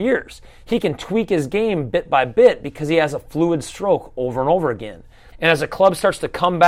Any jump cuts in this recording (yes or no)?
yes